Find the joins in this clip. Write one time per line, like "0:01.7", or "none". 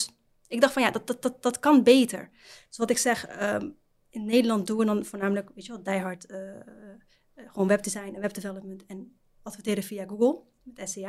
none